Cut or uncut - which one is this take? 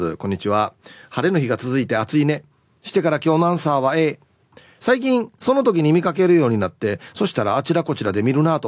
cut